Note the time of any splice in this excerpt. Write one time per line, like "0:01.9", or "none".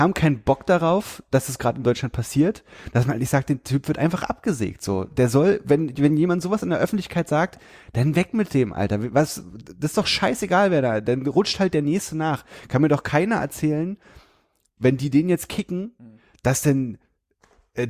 none

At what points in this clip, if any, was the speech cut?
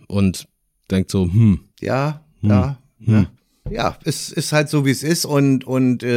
0:01.7

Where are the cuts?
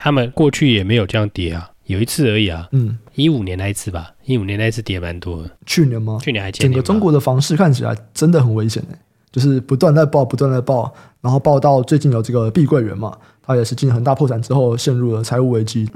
0:05.6

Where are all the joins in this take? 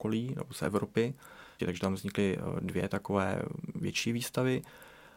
0:01.6

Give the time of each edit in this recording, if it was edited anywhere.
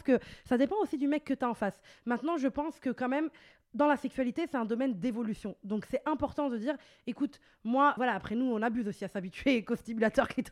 0:08.0

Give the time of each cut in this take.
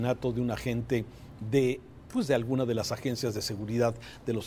0:02.1

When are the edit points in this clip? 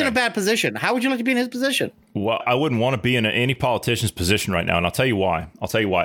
0:02.4

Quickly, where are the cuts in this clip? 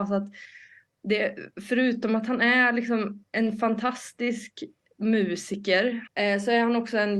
0:06.1

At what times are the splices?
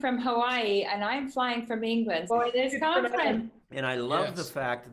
0:02.3
0:03.6

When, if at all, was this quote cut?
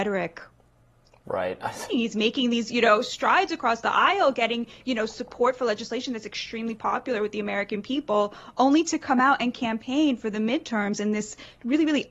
0:01.9

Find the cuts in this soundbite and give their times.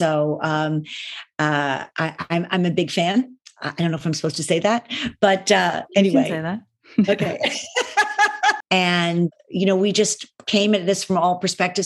0:08.6

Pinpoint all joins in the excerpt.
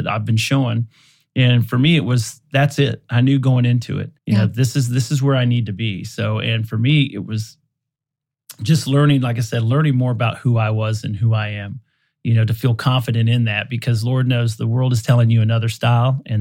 0:04.2

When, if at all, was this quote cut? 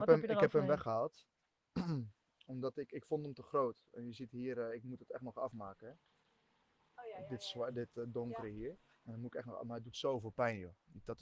none

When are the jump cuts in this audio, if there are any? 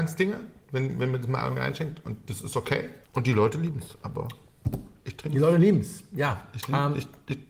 0:03.0

